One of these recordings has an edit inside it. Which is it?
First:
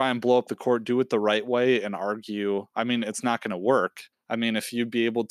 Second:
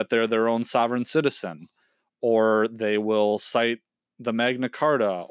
first; 1 cut; at 4.1 s

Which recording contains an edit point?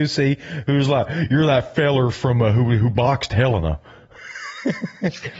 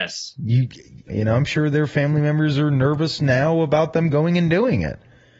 second; 1 cut; at 1.1 s

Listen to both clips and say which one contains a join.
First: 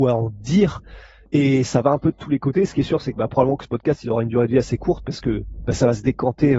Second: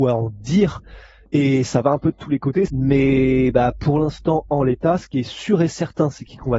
second; 1 cut; at 2.7 s

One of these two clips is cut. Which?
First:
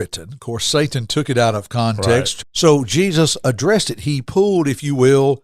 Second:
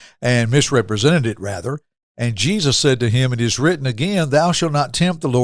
first; 1 cut; at 2.4 s

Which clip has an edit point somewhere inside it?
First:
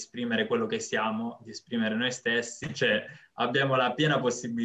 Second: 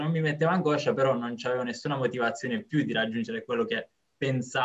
first; 1 cut; at 2.6 s

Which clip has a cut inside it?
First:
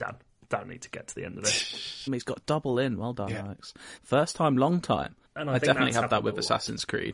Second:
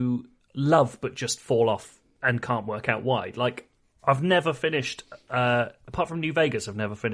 first; 3 cuts; at 2.1 s, 4.0 s, 5.3 s

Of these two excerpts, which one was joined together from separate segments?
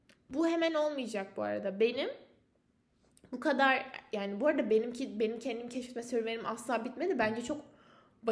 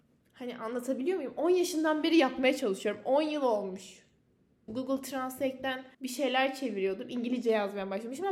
second; 2 cuts; at 4.7 s, 5.9 s

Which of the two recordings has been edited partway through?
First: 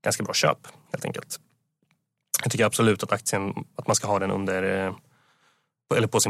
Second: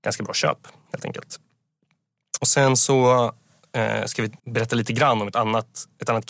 second; 2 cuts; at 2.4 s, 4.4 s

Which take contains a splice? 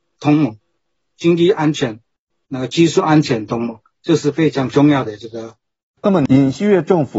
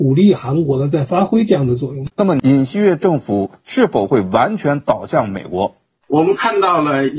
second; 1 cut; at 2.1 s

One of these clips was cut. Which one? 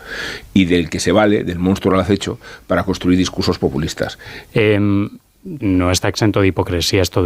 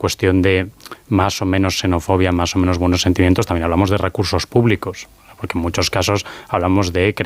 first; 2 cuts; at 4.5 s, 5.6 s

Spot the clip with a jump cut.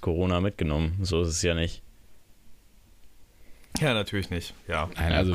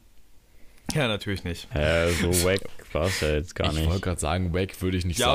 second; 1 cut; at 1.7 s

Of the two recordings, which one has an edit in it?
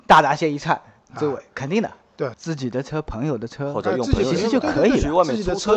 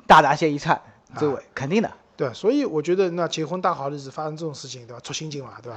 first; 1 cut; at 2.3 s

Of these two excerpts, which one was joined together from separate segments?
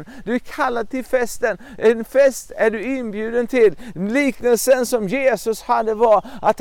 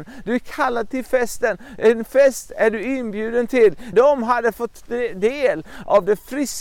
second; 1 cut; at 3.9 s

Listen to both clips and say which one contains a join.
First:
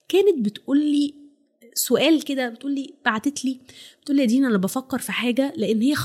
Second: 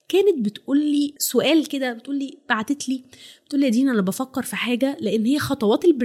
second; 1 cut; at 1.2 s

